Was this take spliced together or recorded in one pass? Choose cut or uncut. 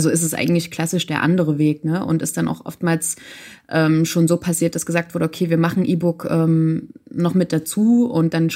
uncut